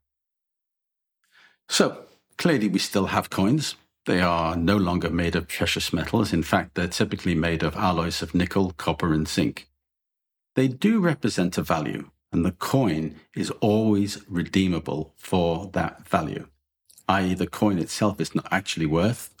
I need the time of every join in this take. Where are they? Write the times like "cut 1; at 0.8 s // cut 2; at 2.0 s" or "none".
cut 1; at 12.2 s